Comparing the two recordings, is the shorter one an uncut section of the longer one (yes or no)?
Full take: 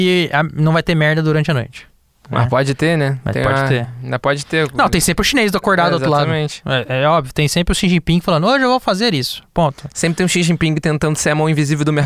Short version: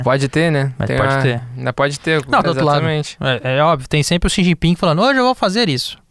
no